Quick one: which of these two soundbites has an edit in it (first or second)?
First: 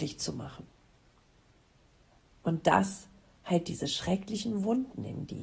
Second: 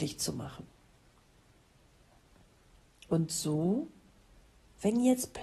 first